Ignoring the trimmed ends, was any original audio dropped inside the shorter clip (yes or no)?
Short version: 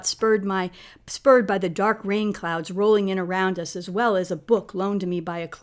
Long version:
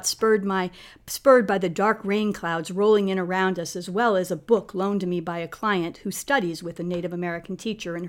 no